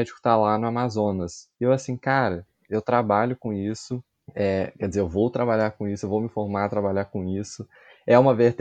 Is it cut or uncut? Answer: uncut